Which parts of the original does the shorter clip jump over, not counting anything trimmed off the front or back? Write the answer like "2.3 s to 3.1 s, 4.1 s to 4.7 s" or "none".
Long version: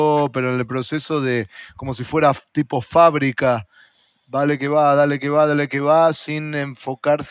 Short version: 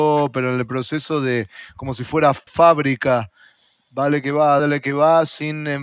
2.5 s to 2.8 s, 5.0 s to 5.5 s